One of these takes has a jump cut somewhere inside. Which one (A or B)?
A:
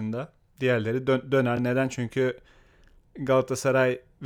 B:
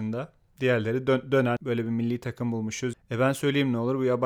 B